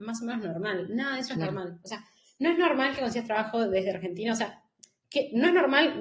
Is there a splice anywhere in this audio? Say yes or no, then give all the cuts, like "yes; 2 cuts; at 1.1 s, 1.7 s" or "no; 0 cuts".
no; 0 cuts